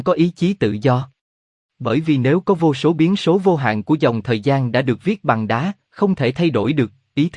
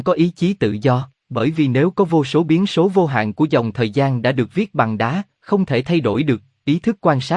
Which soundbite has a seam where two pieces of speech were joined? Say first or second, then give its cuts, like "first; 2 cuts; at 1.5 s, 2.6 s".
second; 1 cut; at 1.2 s